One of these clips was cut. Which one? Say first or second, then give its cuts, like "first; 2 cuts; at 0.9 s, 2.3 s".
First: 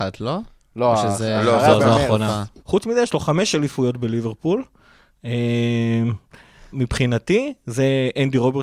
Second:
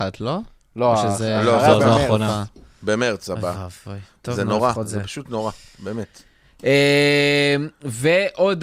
first; 2 cuts; at 2.6 s, 6.7 s